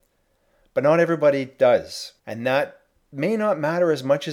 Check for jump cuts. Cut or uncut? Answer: cut